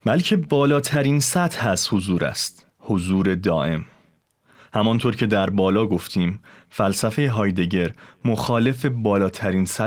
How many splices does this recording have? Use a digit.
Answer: 1